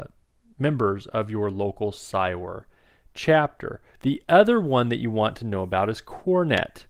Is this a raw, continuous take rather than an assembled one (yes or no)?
no